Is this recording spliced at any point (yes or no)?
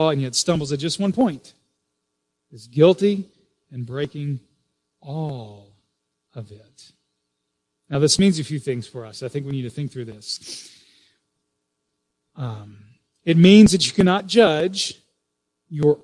no